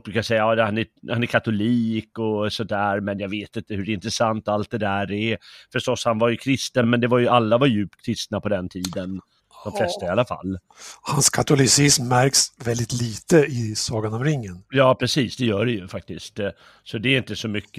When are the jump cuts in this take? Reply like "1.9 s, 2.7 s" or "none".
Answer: none